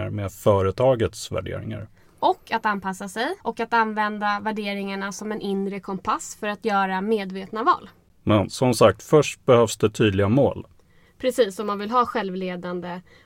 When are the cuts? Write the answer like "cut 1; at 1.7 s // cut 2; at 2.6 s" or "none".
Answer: cut 1; at 3.4 s